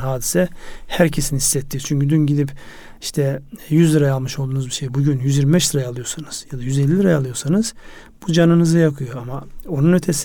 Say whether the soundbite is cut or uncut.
uncut